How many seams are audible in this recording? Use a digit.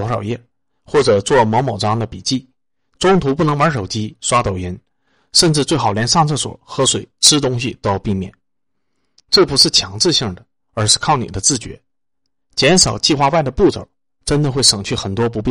0